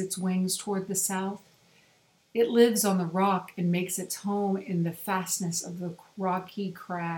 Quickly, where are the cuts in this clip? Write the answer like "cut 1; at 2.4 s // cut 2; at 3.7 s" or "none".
cut 1; at 2.2 s